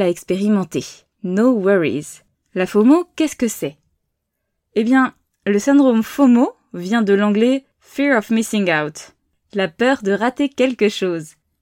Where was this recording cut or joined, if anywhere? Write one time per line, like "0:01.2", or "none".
0:02.3

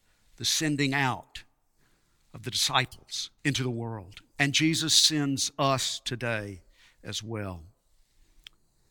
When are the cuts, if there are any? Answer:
0:03.4

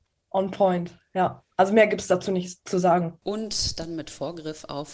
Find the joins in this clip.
0:03.2

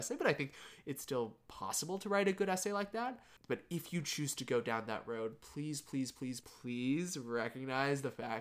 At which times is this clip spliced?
0:06.4

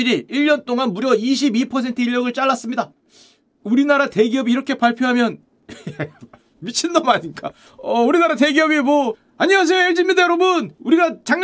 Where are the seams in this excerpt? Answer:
none

